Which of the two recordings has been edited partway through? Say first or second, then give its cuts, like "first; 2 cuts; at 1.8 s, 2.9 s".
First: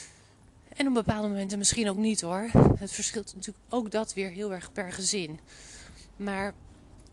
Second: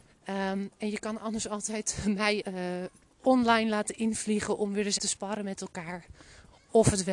second; 2 cuts; at 2.4 s, 5.0 s